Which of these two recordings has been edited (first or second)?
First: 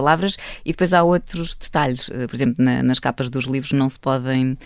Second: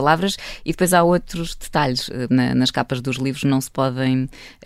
second